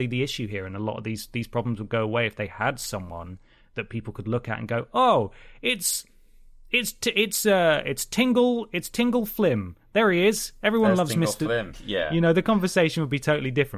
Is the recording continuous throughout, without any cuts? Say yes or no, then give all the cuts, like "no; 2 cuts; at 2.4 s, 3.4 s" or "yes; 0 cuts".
no; 1 cut; at 11.7 s